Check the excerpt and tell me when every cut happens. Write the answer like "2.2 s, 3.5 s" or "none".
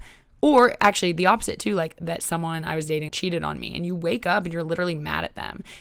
3.1 s